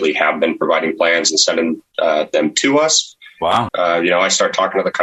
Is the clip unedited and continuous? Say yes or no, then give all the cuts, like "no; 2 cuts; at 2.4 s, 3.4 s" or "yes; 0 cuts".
no; 1 cut; at 3.7 s